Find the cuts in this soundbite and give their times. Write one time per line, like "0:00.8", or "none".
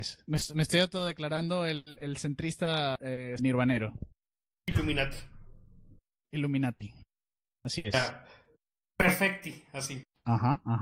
0:03.4